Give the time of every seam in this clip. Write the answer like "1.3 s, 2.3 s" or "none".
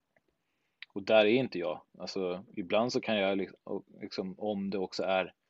none